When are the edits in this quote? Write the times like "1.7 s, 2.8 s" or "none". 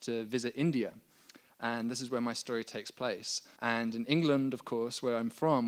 3.6 s